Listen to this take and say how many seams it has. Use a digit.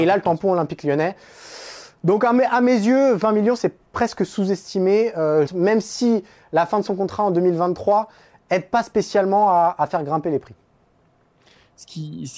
1